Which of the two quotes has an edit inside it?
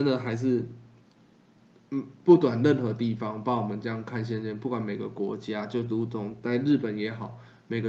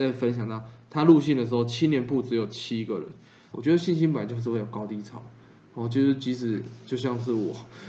second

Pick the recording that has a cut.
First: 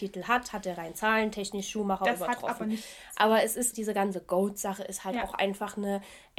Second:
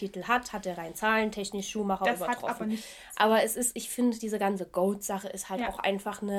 first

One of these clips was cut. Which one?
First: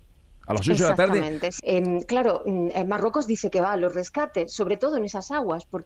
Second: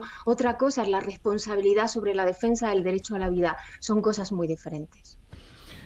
first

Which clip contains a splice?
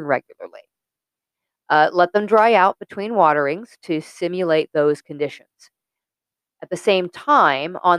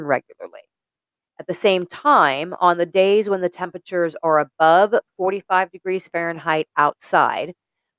second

